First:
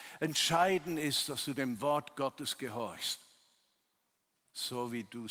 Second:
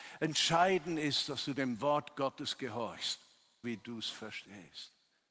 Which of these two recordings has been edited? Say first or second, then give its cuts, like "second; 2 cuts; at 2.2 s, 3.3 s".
second; 1 cut; at 3.6 s